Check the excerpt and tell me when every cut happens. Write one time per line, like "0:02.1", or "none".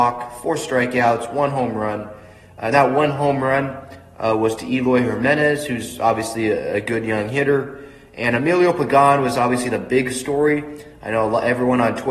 none